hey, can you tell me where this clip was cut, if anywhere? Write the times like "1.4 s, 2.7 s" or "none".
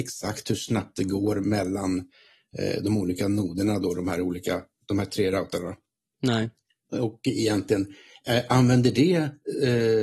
none

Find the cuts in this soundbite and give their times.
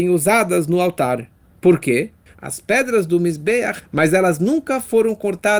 2.3 s, 3.8 s

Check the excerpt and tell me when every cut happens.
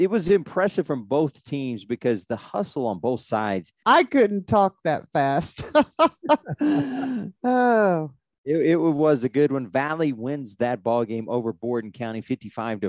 3.8 s

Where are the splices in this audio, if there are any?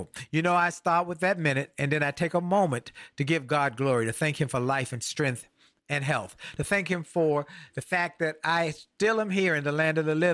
none

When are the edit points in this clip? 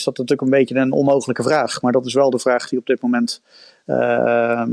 none

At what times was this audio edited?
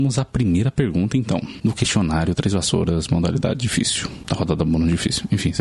none

